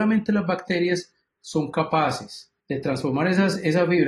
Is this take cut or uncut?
cut